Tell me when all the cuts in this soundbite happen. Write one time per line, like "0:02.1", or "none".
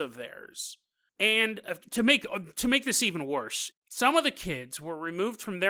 0:03.7